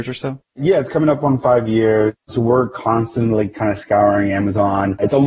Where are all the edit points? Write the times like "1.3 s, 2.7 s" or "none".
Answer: none